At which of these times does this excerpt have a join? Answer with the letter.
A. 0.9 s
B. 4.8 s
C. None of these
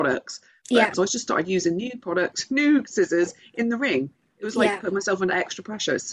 A